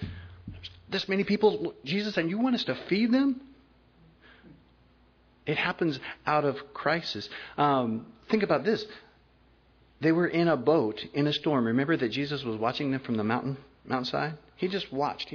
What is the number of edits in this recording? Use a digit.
0